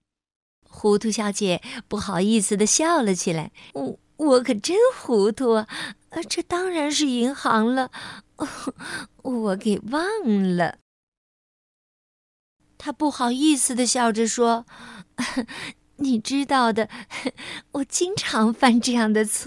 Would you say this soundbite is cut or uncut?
cut